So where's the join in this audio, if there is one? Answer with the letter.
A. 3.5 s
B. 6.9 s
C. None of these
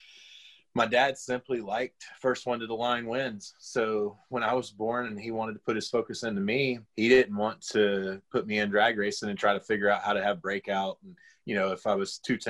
B